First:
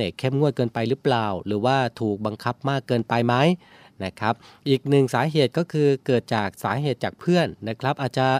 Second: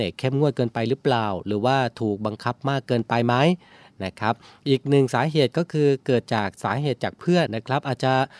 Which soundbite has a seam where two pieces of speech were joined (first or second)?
second